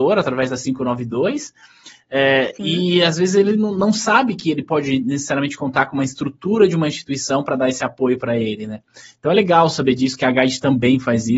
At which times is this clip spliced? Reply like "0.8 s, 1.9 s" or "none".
none